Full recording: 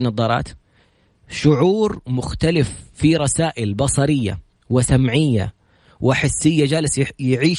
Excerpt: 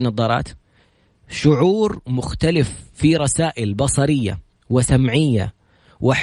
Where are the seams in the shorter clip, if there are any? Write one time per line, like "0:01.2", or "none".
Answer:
none